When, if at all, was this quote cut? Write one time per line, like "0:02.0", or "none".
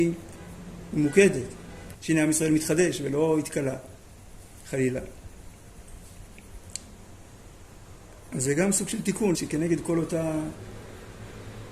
0:01.9
0:09.3